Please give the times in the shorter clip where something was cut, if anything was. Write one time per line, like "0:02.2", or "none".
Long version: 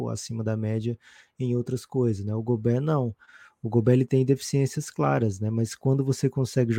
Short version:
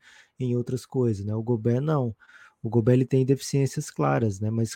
none